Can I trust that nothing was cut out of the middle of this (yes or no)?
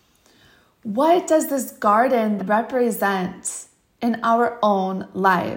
no